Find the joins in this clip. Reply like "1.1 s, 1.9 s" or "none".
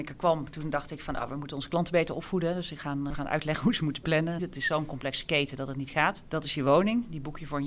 3.1 s, 4.4 s, 6.2 s